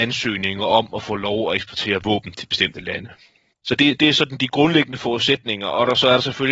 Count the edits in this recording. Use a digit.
1